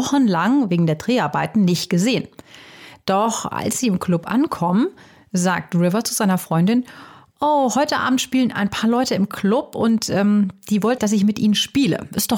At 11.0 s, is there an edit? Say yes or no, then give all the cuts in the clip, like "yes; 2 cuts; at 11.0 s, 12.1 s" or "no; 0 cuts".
yes; 1 cut; at 11.0 s